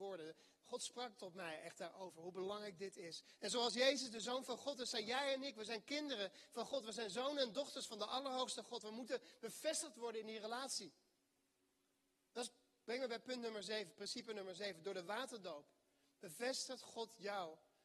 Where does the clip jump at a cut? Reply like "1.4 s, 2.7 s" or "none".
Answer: 3.4 s